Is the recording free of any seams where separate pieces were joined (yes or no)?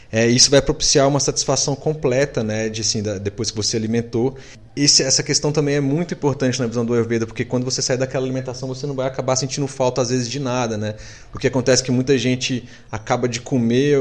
yes